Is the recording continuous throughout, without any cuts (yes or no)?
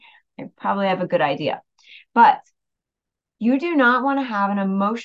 yes